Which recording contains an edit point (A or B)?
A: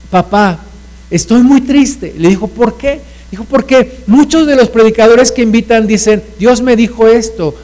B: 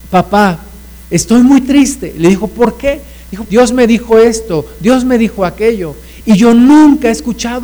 B